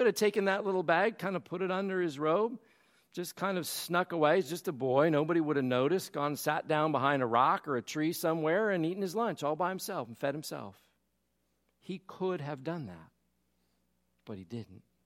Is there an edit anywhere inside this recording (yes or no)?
no